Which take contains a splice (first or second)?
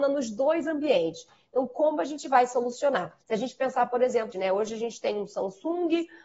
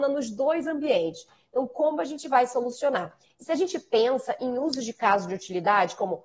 first